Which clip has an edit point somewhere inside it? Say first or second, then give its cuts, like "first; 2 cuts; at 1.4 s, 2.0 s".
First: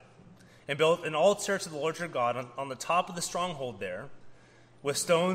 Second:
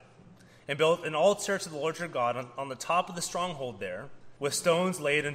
second; 1 cut; at 4.4 s